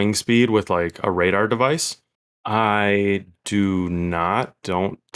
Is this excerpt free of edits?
no; 1 cut; at 2.3 s

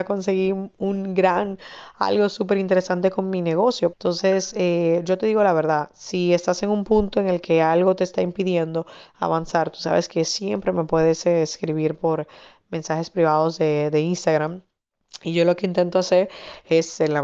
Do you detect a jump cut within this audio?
yes; 1 cut; at 3.9 s

